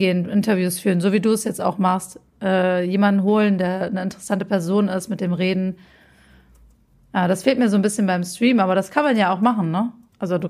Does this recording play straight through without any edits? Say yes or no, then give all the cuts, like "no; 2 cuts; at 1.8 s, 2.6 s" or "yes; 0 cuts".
yes; 0 cuts